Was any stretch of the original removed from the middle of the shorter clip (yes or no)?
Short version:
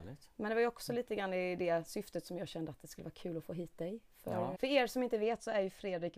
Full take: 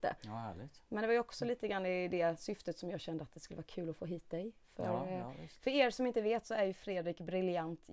yes